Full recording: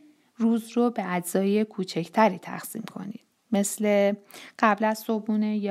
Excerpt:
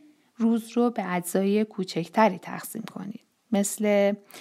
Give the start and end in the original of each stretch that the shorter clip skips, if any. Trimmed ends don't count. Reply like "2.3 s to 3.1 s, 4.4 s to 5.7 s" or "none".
none